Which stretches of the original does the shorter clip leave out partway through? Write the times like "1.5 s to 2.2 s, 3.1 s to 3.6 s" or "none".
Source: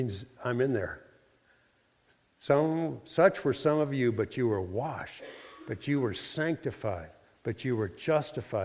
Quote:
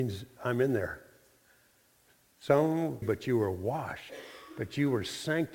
3.0 s to 4.1 s